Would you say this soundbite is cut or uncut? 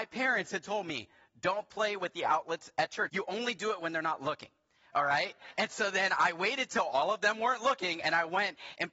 cut